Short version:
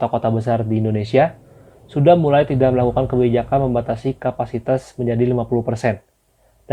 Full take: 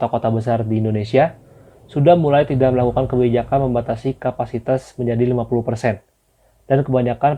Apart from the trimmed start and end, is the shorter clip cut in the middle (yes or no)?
no